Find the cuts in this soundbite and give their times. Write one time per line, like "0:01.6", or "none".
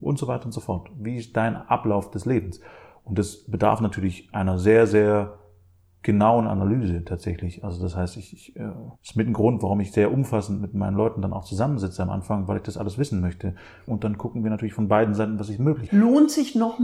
0:09.0
0:13.9
0:15.9